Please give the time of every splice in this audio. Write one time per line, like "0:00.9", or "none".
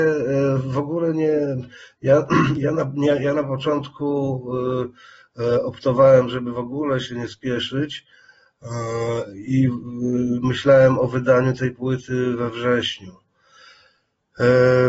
none